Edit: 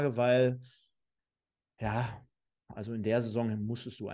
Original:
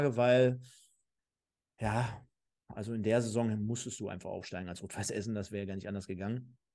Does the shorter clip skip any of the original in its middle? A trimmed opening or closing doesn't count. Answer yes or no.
no